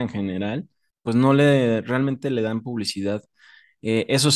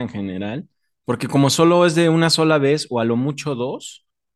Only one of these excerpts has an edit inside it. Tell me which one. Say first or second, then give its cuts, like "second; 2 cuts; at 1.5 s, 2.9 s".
first; 1 cut; at 0.9 s